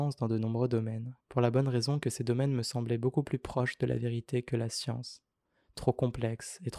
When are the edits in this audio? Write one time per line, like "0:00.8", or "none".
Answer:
0:01.2